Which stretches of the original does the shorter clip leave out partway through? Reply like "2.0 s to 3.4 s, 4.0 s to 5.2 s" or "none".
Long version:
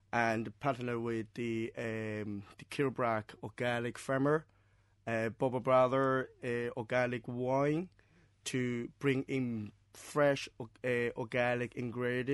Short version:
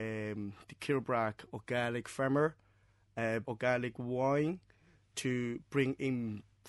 5.3 s to 6.7 s